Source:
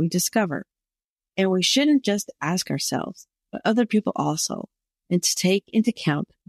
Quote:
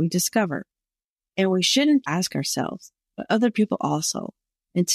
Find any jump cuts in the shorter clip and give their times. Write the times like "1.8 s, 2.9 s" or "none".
2.0 s